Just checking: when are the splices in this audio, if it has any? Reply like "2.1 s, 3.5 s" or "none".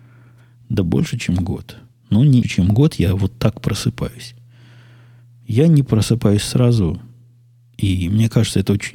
2.4 s